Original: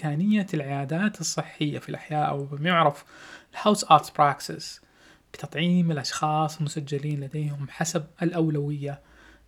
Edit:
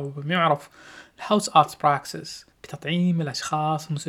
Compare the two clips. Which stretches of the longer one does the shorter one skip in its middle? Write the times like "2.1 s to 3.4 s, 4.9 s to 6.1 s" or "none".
4.9 s to 5.2 s